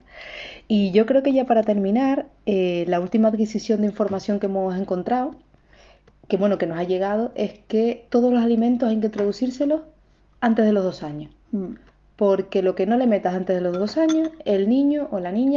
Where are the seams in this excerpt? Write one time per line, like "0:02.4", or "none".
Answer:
0:08.1